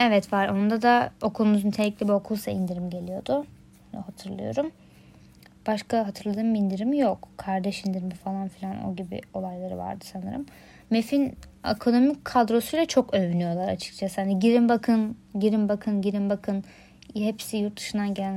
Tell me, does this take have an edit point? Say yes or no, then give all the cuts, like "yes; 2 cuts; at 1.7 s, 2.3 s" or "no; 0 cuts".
no; 0 cuts